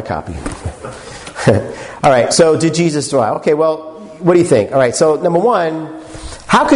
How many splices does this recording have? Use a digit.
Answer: 0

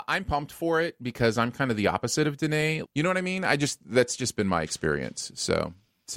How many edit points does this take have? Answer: 1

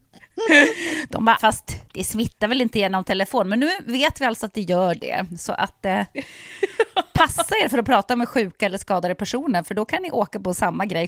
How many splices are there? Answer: 1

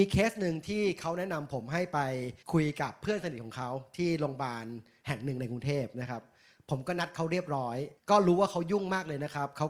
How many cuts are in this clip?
2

